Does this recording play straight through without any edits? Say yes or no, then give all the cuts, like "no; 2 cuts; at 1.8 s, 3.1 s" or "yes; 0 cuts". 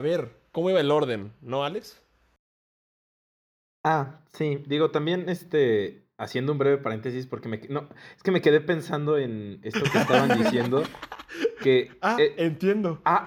yes; 0 cuts